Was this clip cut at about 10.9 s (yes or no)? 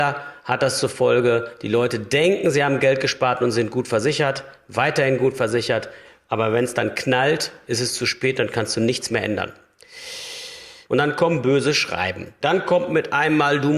yes